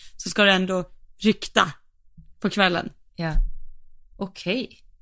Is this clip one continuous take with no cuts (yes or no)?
no